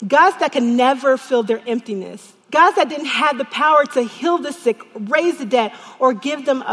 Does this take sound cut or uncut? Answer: cut